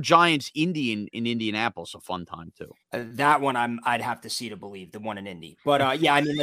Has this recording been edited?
yes; 1 cut; at 2.8 s

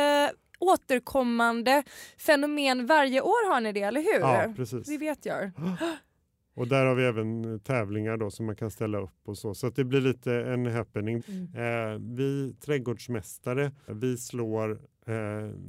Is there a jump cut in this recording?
yes; 2 cuts; at 11.2 s, 13.9 s

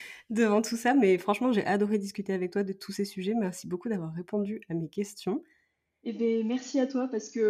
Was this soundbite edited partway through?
no; 0 cuts

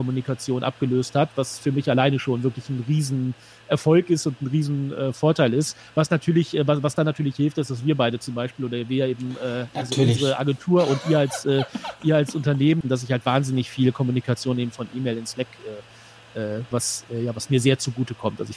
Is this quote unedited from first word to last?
no; 2 cuts; at 12.8 s, 16.7 s

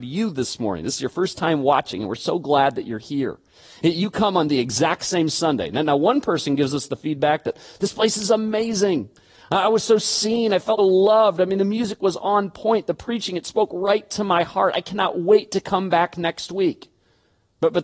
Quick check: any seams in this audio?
yes; 1 cut; at 10.8 s

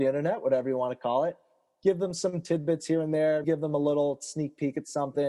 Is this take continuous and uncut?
no; 1 cut; at 3.4 s

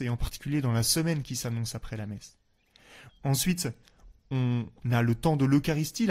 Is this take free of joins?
no; 1 cut; at 3.1 s

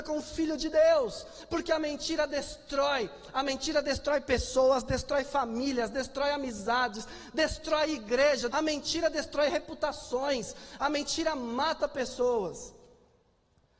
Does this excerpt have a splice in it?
yes; 1 cut; at 8.5 s

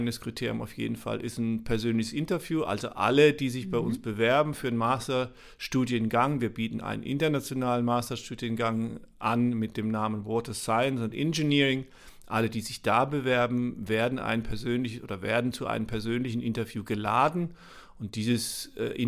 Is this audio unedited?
yes; 0 cuts

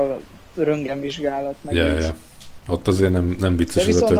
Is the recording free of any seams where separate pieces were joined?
no; 1 cut; at 2.6 s

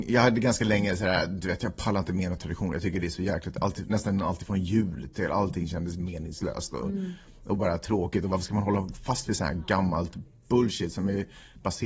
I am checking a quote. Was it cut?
no; 0 cuts

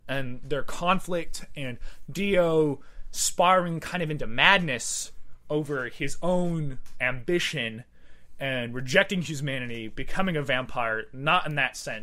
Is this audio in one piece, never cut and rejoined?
yes; 0 cuts

